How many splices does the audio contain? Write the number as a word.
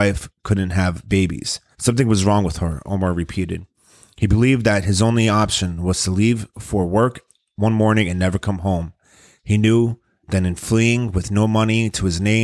one